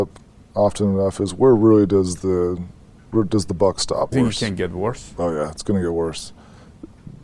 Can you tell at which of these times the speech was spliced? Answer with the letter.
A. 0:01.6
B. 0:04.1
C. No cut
B